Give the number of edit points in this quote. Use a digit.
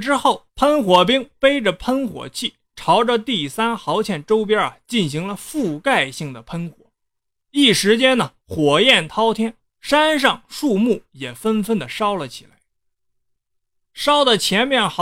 1